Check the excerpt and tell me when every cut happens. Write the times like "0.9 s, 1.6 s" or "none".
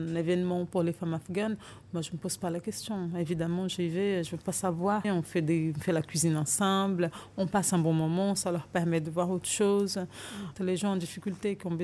5.0 s, 10.5 s